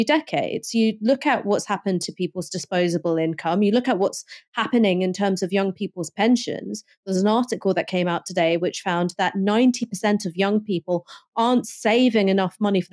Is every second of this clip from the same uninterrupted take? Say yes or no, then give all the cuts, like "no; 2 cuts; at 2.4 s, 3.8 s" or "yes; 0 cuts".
yes; 0 cuts